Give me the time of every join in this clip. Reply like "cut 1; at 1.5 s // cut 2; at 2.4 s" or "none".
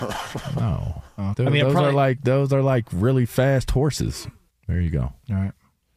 cut 1; at 1.3 s // cut 2; at 4.5 s